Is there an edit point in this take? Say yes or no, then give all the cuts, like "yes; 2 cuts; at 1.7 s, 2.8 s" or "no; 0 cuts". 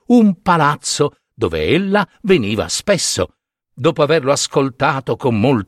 no; 0 cuts